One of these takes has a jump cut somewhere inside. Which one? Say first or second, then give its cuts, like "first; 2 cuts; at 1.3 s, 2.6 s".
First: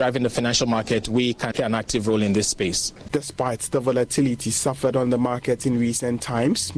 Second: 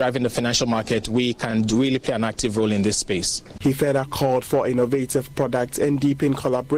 first; 2 cuts; at 1.5 s, 3.1 s